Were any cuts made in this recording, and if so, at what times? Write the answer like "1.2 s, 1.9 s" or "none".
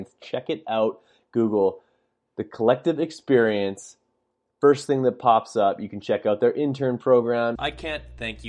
7.6 s